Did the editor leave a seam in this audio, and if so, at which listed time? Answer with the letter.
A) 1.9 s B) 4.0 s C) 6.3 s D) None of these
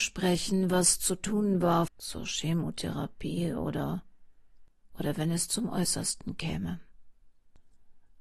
A